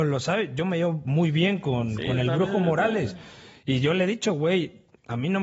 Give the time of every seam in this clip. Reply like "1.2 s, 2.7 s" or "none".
none